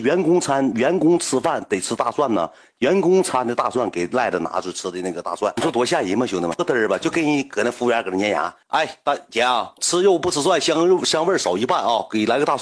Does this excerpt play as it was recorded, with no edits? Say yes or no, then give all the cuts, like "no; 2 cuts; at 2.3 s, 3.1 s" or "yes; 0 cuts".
no; 2 cuts; at 8.6 s, 9.8 s